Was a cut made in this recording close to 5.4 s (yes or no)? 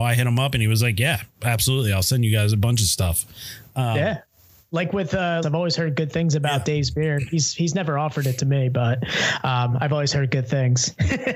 yes